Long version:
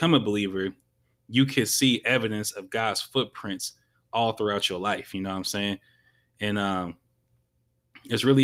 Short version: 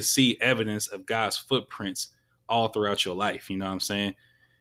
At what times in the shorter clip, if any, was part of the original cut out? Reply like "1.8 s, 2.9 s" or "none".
none